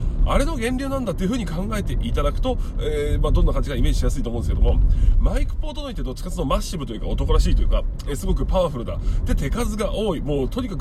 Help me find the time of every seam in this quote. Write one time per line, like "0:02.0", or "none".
none